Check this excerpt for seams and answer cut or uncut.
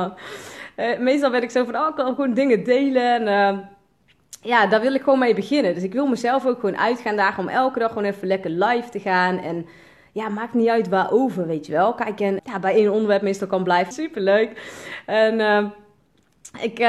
cut